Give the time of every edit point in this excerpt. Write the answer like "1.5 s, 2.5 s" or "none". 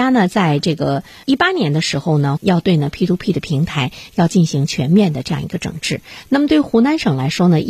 2.4 s